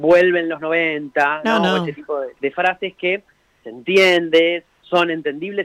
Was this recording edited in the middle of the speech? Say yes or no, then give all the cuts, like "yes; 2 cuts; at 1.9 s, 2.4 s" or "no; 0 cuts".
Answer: yes; 2 cuts; at 2.4 s, 4.7 s